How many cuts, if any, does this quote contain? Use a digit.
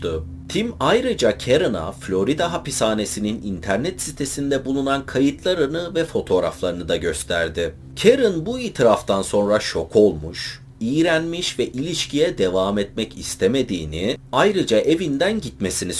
0